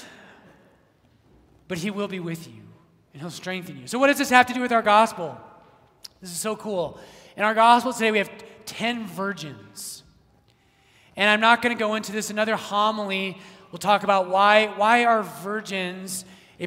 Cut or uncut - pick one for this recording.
uncut